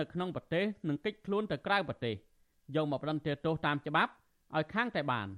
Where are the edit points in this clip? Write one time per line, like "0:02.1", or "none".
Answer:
none